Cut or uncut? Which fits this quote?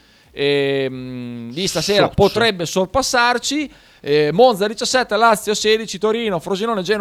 uncut